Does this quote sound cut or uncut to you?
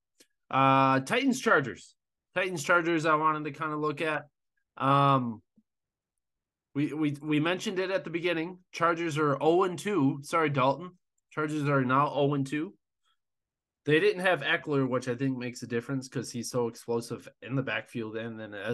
cut